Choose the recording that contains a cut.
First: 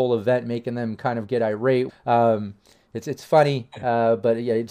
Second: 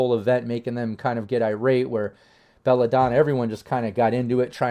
first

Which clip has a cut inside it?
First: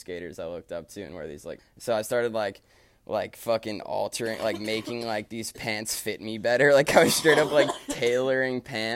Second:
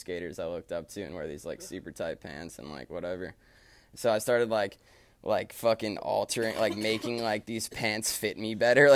first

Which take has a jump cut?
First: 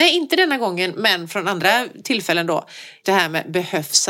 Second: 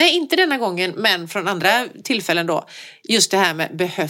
first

